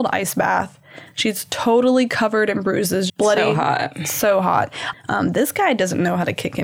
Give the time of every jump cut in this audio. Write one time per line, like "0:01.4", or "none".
0:03.1
0:04.9